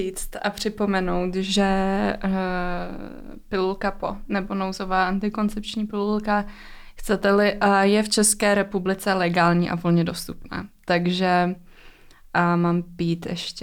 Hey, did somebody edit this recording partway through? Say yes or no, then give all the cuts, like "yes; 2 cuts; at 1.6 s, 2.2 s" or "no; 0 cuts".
no; 0 cuts